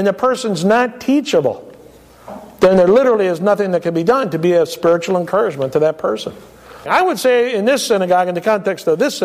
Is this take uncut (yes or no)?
no